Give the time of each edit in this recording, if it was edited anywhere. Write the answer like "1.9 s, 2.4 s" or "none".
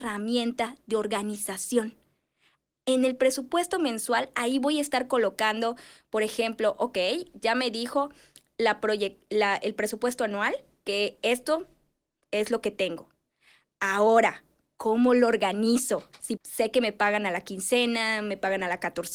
16.4 s